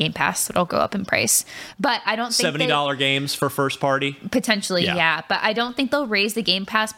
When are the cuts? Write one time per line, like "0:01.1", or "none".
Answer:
none